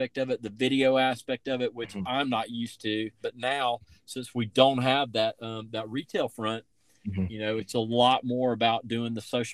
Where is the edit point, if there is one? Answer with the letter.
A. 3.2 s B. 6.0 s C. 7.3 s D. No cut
A